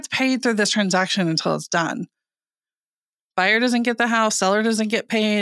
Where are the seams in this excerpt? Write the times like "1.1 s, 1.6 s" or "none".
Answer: none

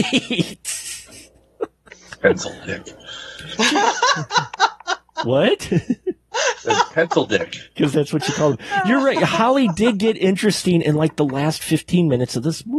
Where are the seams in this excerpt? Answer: 7.7 s

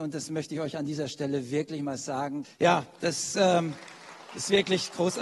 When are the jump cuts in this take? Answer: 2.4 s

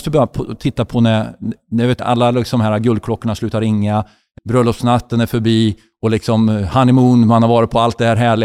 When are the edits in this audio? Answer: 2.0 s, 4.4 s

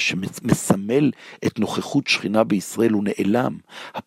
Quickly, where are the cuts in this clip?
none

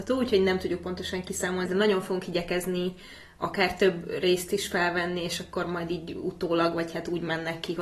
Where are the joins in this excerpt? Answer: 1.7 s

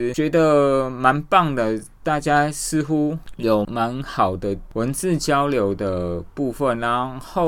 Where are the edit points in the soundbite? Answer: 3.6 s

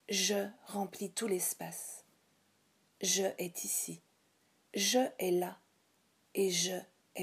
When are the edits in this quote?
none

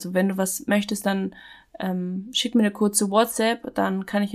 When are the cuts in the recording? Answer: none

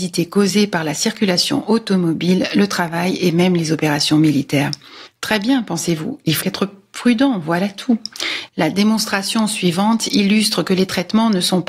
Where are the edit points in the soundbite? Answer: 6.4 s, 8.5 s

